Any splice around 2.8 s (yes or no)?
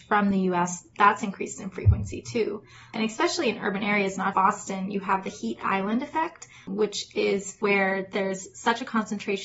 no